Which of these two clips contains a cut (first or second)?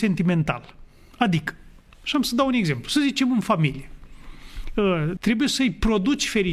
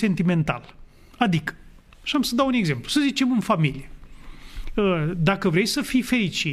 first